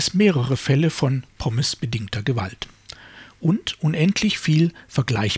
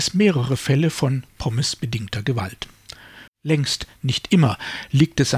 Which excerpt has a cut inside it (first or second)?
second